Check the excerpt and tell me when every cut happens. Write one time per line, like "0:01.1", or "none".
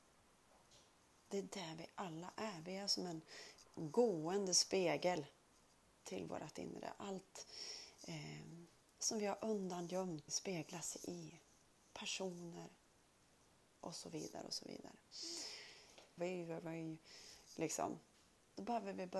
0:10.3
0:16.2